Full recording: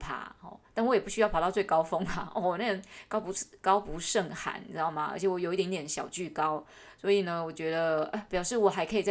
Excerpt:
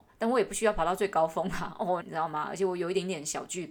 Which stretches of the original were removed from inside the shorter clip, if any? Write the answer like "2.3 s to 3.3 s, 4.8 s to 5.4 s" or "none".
2.6 s to 4.6 s